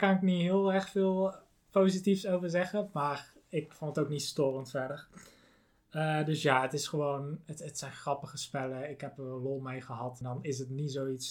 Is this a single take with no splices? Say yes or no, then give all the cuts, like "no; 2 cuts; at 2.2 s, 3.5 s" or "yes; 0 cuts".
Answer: no; 1 cut; at 10.2 s